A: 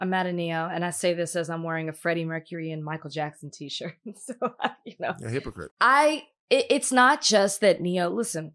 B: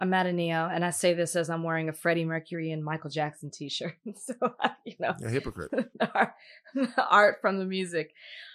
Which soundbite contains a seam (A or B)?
A